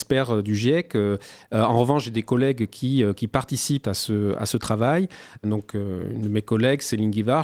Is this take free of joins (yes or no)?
no